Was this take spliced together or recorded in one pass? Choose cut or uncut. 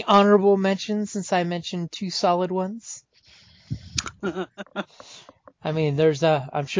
cut